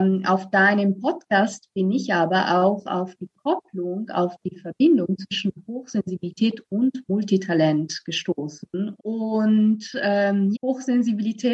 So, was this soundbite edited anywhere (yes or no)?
yes